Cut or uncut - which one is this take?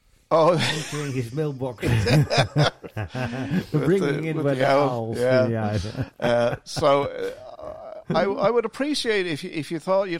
uncut